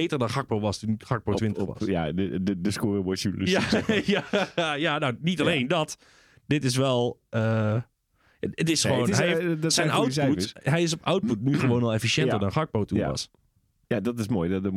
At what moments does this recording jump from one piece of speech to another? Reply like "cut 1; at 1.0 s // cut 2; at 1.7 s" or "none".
none